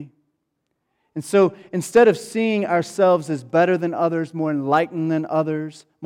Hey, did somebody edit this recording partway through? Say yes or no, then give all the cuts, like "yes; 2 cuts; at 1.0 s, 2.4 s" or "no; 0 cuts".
no; 0 cuts